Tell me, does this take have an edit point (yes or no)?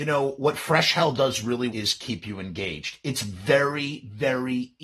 yes